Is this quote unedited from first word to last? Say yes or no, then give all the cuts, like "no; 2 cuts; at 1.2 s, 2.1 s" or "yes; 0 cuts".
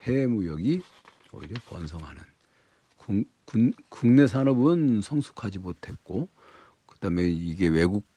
yes; 0 cuts